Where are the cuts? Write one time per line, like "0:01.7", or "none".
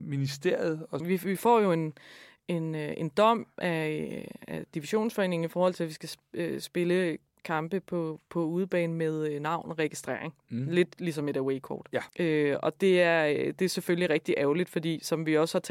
0:01.0
0:12.1